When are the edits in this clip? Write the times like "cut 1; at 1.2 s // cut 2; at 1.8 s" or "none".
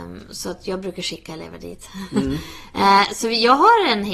none